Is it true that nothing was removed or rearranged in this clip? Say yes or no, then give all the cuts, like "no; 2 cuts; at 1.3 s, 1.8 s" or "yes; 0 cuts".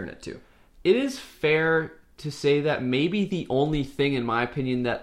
yes; 0 cuts